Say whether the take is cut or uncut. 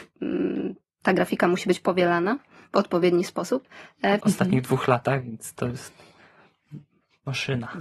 cut